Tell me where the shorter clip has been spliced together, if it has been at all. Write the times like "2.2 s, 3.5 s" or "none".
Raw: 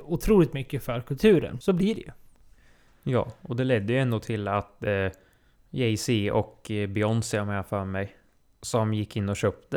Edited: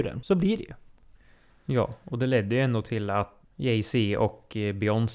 3.4 s